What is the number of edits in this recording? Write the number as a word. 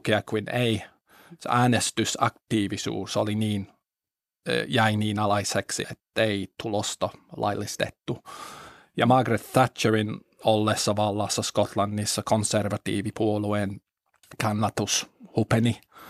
one